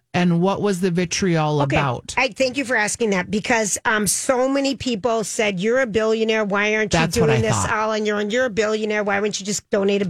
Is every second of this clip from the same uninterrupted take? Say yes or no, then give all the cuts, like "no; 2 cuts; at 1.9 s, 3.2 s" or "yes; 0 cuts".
yes; 0 cuts